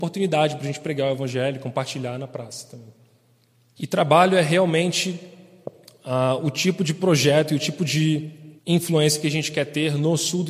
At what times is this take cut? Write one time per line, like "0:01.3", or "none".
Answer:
0:03.8
0:08.6

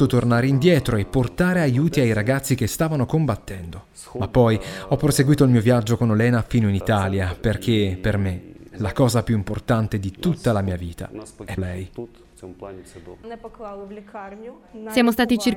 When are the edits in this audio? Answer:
0:11.6

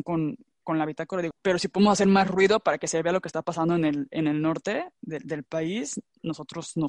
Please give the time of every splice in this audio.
0:01.3

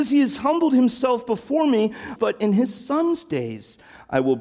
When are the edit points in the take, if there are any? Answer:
0:02.2

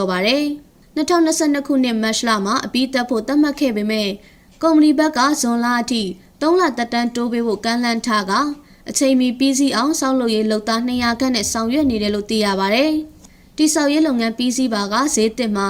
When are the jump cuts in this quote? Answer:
none

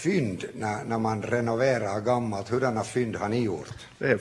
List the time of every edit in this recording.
none

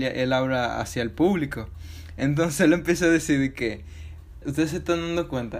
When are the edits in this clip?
0:04.4

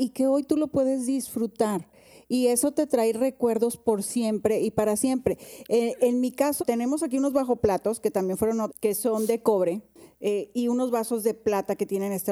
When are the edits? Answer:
0:06.6
0:08.7

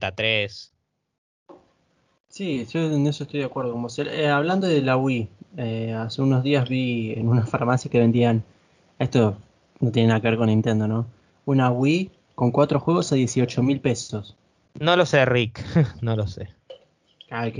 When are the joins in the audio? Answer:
0:14.7

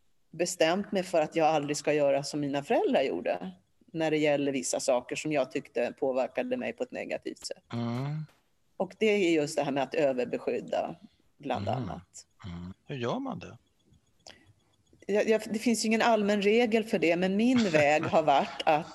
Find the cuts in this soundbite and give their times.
0:12.7

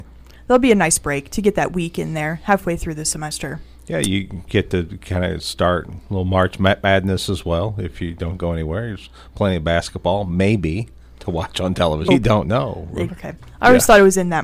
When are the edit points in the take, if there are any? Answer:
0:12.1
0:13.1

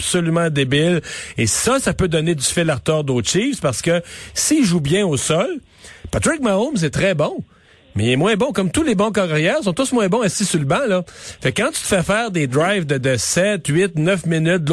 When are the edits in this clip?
none

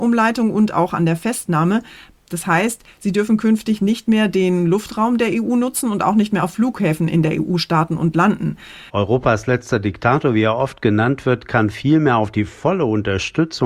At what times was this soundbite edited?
0:02.2
0:08.9

